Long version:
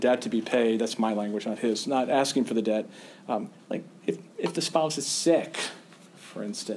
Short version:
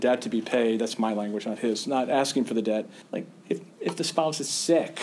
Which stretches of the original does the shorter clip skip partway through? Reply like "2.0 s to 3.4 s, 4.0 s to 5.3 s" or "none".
3.0 s to 3.6 s